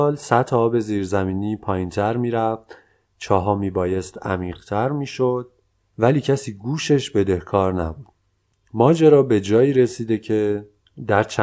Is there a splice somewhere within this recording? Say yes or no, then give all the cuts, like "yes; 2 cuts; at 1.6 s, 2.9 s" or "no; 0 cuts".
no; 0 cuts